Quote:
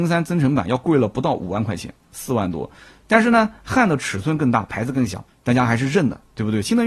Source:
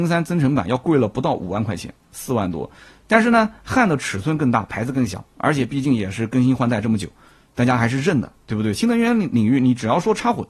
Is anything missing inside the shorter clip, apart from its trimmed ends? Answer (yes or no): yes